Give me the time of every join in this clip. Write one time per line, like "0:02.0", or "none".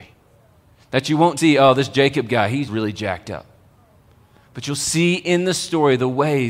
0:01.4
0:02.7